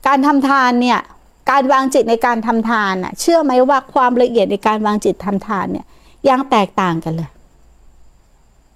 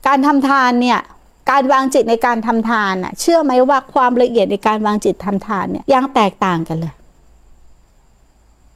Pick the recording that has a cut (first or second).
second